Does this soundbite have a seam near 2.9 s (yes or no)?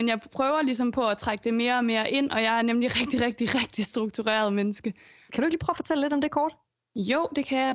no